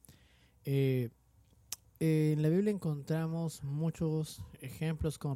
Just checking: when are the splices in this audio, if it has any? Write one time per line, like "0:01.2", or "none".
0:01.8